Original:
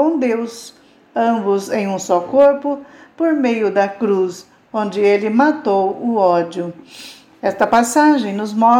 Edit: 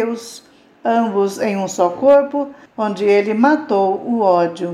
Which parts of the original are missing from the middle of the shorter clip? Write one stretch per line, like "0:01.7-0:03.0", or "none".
0:03.0-0:04.6